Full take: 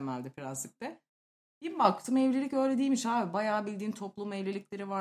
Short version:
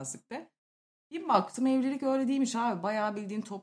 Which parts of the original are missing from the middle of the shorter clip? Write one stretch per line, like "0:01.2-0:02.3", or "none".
none